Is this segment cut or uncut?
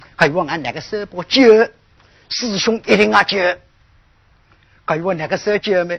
uncut